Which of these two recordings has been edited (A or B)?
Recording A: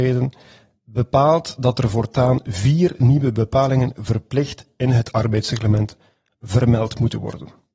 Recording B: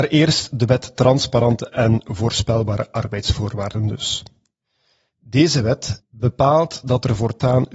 B